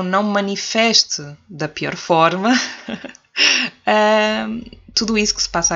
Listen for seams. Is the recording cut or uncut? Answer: uncut